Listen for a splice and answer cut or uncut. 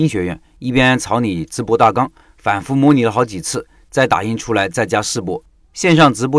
uncut